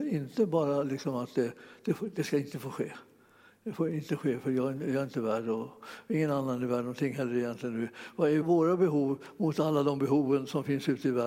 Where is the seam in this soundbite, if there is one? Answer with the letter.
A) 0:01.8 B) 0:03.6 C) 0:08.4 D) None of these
C